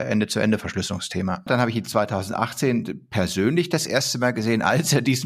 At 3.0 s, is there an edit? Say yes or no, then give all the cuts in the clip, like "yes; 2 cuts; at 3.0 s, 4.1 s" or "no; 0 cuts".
no; 1 cut; at 1.5 s